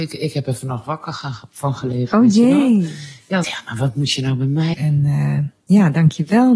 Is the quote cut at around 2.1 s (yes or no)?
no